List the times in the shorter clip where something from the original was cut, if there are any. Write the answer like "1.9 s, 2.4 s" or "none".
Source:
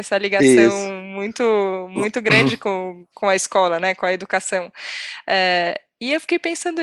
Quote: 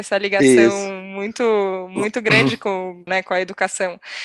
3.1 s